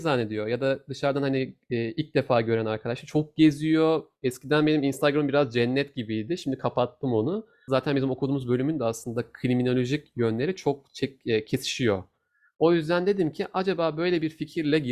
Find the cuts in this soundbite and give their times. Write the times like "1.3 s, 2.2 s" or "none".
7.7 s